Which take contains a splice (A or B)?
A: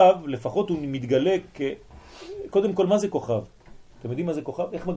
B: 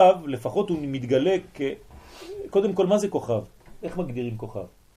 B